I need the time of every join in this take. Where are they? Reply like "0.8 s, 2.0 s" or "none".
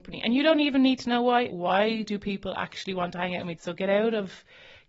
1.5 s, 3.5 s